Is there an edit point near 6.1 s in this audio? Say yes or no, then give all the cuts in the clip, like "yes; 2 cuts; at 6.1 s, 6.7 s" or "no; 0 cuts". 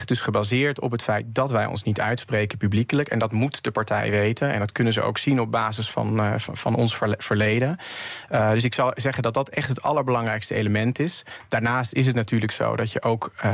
no; 0 cuts